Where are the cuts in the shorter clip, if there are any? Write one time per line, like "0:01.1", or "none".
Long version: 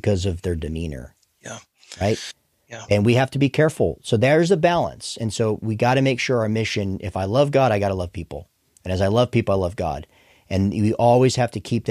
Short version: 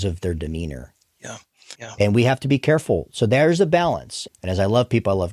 0:01.7
0:04.3